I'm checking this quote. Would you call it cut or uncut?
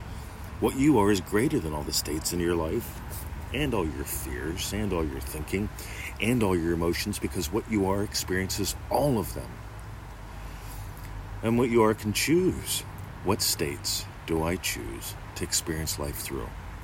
cut